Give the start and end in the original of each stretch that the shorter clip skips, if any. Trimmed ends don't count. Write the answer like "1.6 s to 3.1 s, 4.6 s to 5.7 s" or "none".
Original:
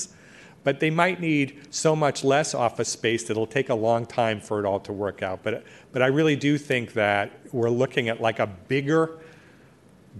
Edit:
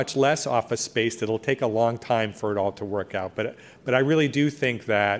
none